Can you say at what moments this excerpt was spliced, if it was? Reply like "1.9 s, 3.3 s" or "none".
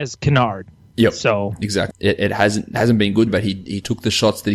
1.9 s, 3.3 s